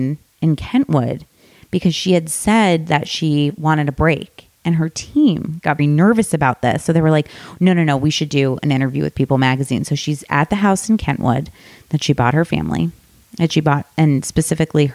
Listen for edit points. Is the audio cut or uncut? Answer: cut